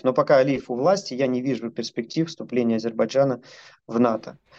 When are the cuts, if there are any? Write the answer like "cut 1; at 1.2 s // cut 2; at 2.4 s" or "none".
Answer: none